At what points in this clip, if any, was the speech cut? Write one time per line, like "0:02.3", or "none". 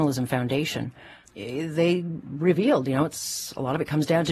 0:01.2